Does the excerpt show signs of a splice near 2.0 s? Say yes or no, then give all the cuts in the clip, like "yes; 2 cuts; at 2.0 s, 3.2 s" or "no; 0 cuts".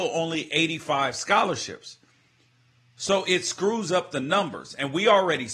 no; 0 cuts